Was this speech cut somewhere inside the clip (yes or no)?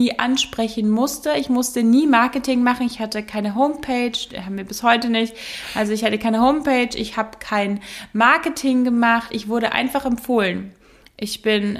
no